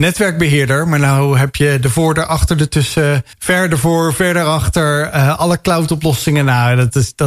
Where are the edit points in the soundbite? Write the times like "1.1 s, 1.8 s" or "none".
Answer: 3.3 s

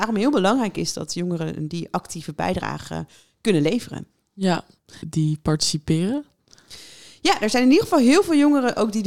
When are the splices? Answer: 5.0 s

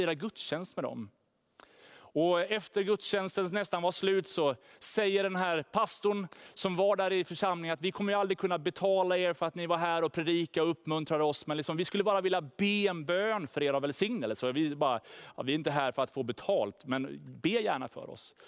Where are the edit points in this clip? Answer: none

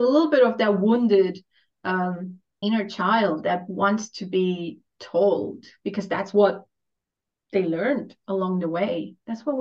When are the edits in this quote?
2.6 s

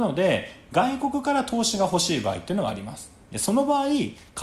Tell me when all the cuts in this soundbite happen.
none

